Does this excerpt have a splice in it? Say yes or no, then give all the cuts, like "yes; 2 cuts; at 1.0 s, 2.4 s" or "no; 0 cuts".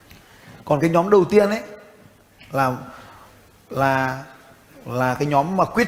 no; 0 cuts